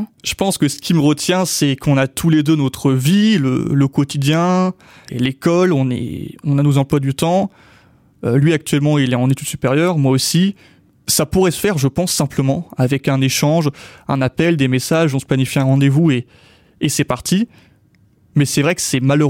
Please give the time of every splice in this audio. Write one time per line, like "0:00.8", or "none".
none